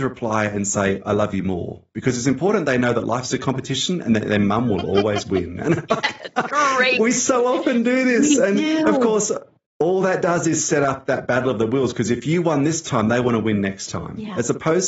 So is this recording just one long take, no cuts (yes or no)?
yes